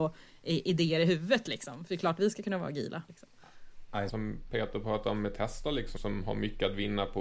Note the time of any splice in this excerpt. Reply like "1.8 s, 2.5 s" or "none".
3.1 s, 4.1 s, 6.0 s